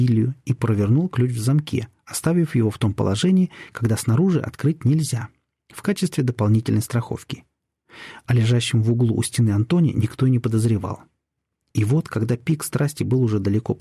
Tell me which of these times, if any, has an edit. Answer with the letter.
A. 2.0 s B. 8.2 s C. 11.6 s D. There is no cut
C